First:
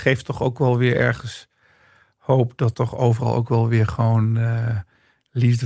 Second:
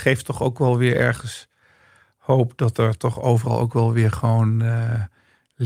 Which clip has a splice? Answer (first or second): first